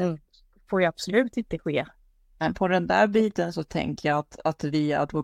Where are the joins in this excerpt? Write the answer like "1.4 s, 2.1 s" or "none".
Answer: none